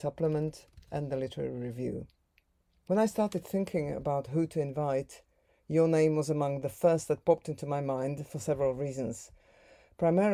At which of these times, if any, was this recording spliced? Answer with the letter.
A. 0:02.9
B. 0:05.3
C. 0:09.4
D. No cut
A